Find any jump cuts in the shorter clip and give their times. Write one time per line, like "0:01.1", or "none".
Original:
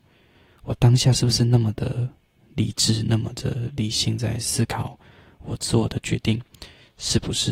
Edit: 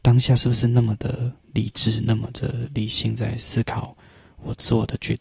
0:01.4